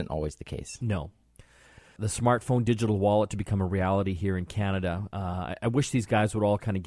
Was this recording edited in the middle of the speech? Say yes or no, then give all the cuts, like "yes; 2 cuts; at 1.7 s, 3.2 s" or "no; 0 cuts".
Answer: yes; 1 cut; at 2.0 s